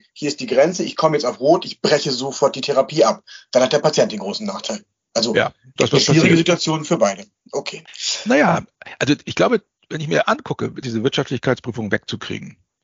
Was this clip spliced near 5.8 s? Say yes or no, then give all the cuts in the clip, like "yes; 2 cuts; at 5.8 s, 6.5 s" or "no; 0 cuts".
yes; 2 cuts; at 5.8 s, 10.8 s